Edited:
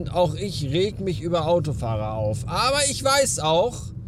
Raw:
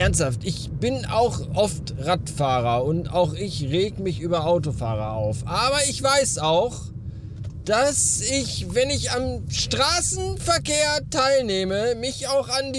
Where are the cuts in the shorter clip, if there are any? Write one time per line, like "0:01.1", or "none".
none